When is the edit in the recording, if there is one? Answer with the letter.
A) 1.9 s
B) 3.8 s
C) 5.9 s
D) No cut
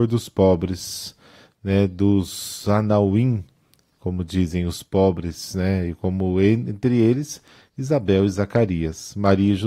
D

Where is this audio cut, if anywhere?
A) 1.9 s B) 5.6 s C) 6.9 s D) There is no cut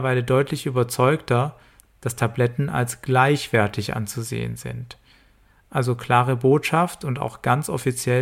A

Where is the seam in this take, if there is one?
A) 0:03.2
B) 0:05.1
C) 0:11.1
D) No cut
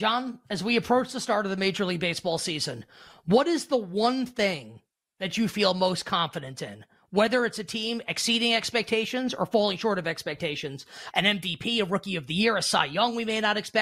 C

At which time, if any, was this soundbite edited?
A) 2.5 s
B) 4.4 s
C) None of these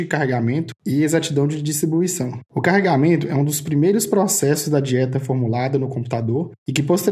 A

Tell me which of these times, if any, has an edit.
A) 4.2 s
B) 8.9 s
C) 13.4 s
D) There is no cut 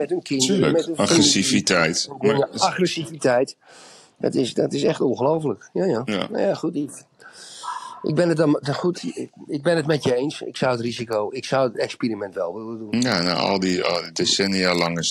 B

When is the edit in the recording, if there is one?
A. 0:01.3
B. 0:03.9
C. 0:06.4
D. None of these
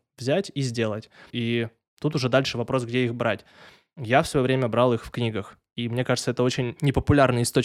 A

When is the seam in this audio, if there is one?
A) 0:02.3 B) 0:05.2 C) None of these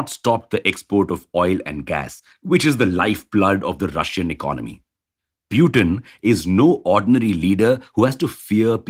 A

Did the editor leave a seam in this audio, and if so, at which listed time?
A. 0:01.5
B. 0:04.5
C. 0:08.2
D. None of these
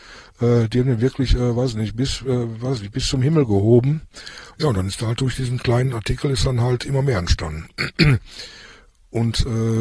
B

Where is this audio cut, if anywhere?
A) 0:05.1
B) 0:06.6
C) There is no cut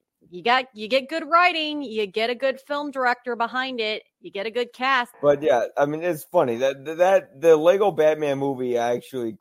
A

